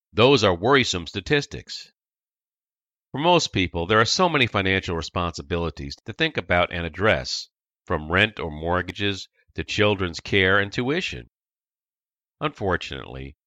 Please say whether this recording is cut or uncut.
uncut